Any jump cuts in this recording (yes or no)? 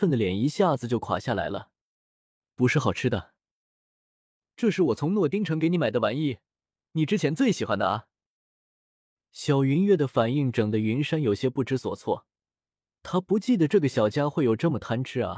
no